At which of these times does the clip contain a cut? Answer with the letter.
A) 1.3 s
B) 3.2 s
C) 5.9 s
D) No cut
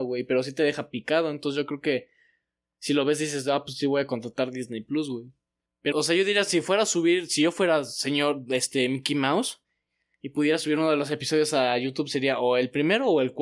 C